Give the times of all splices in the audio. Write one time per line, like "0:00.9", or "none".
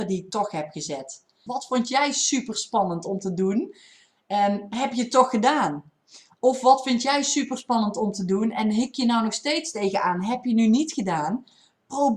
0:01.5

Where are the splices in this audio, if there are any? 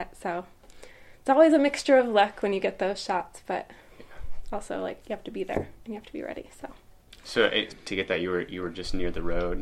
0:07.7

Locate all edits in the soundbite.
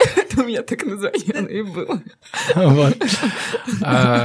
none

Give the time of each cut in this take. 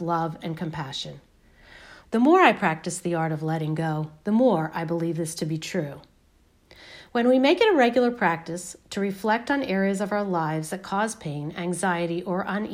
0:02.0

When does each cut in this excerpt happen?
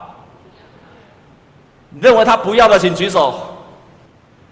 none

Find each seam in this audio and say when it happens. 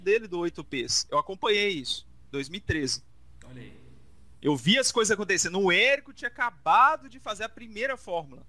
none

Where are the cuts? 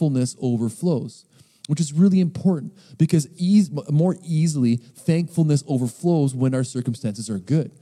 none

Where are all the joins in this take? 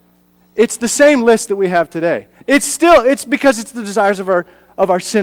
0:02.4

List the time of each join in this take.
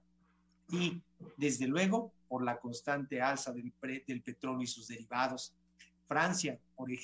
none

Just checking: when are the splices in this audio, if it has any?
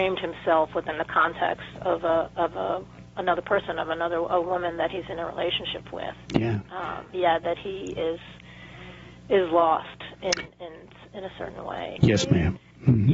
0:07.1
0:12.0

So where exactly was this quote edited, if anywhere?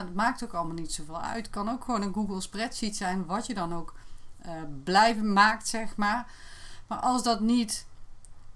none

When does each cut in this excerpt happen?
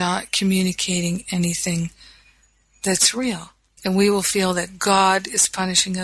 0:03.8

